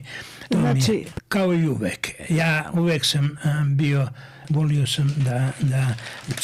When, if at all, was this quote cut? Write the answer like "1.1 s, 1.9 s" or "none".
1.1 s, 4.4 s